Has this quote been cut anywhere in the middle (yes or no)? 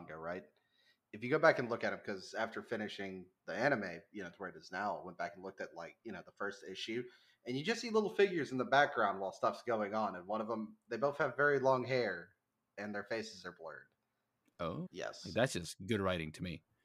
yes